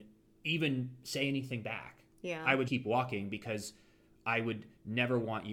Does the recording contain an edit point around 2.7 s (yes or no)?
yes